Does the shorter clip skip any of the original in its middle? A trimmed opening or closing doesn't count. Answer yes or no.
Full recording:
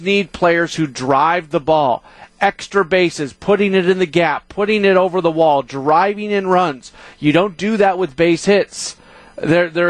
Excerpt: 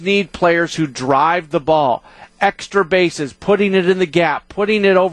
no